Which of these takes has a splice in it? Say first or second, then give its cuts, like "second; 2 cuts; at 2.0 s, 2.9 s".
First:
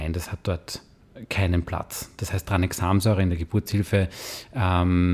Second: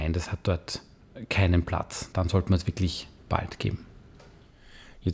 second; 1 cut; at 2.1 s